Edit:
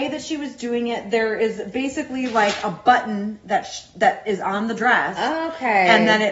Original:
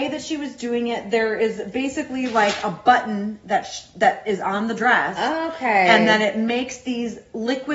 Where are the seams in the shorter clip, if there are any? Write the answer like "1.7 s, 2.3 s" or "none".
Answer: none